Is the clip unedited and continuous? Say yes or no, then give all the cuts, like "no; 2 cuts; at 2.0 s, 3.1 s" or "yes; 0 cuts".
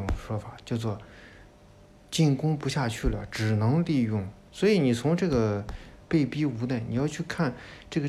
no; 2 cuts; at 4.5 s, 6.0 s